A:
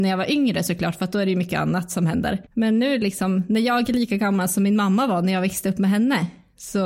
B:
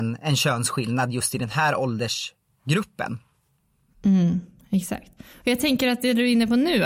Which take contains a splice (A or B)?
A